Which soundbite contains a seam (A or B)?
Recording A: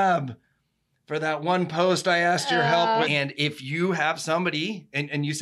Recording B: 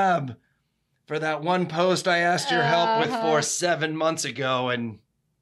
A